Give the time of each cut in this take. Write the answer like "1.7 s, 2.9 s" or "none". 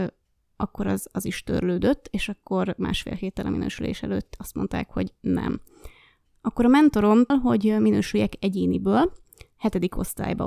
7.3 s